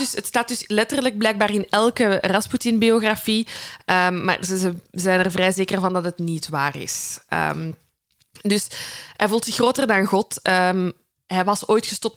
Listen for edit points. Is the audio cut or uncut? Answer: uncut